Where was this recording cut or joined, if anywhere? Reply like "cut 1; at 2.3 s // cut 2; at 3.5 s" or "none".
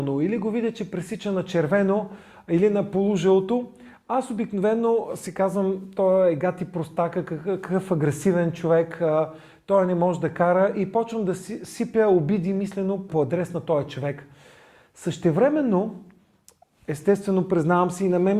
cut 1; at 13.1 s